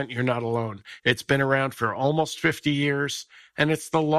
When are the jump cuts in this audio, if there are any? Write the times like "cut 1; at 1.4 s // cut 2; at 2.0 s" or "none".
cut 1; at 1.0 s